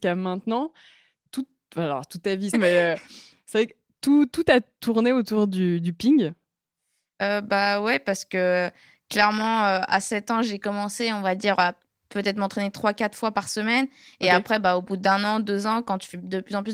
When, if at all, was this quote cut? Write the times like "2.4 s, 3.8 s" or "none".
2.5 s